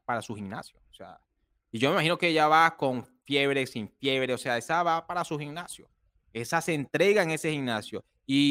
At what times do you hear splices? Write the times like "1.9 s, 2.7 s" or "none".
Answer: none